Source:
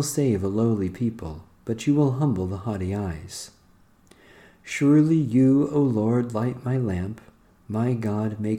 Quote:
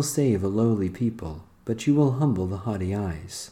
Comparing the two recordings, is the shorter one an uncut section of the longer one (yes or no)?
yes